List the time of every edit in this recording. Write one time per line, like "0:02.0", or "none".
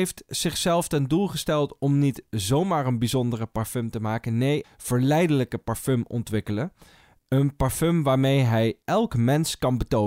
0:04.6